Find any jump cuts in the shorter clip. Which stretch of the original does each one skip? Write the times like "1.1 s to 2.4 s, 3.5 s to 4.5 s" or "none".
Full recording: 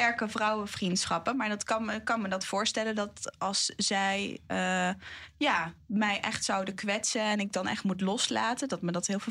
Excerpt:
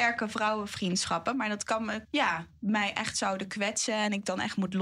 2.0 s to 5.3 s